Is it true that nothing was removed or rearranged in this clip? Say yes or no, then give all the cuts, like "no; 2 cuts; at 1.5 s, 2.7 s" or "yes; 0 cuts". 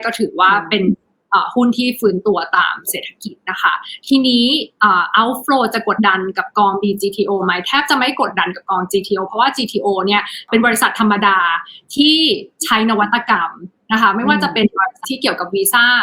no; 2 cuts; at 6.0 s, 15.0 s